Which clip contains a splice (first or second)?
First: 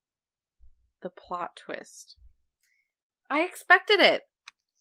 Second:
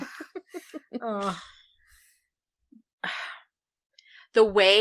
first